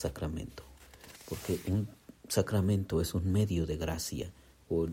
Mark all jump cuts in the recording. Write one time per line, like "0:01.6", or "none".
none

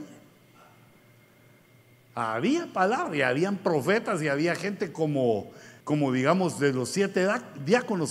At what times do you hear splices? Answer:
0:05.8

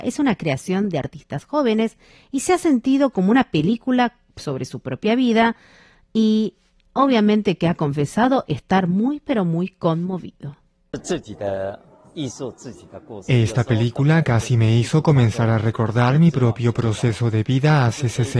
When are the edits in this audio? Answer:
none

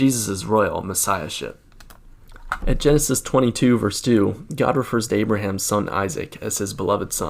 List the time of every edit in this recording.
none

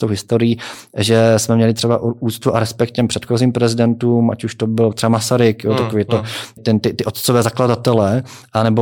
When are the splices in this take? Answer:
0:06.6

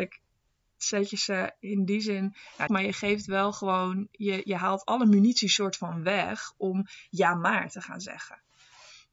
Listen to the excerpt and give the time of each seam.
0:02.7

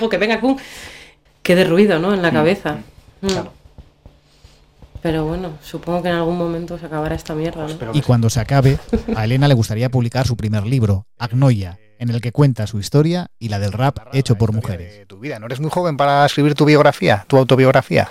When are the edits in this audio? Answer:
0:01.3

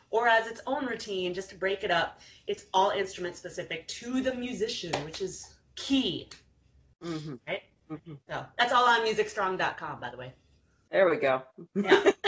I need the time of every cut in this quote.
none

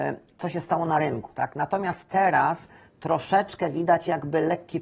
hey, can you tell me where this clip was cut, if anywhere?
0:01.3

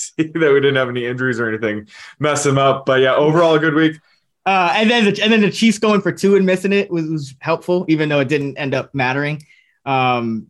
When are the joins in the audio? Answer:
0:04.3
0:06.9

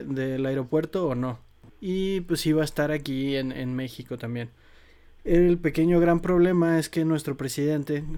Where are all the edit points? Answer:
0:01.7

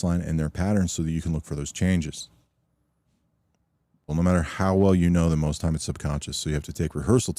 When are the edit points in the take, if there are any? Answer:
0:04.1

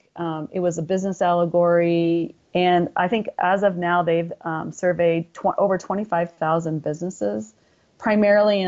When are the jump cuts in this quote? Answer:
0:02.4

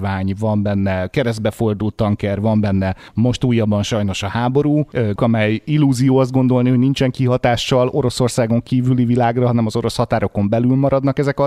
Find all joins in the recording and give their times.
0:05.2

